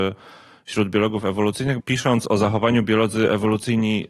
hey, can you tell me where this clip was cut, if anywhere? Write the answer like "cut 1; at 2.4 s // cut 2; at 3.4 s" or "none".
cut 1; at 1.8 s